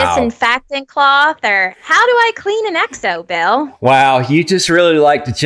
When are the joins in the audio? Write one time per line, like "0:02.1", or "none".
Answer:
0:01.7